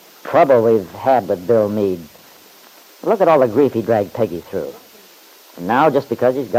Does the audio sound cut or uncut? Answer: uncut